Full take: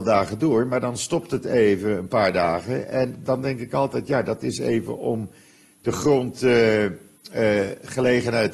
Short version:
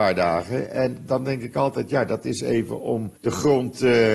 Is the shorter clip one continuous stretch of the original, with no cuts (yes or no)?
no